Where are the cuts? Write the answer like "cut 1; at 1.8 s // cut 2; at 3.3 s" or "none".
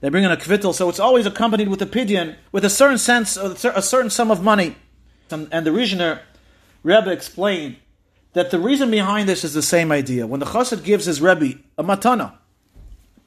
cut 1; at 2.4 s // cut 2; at 5.3 s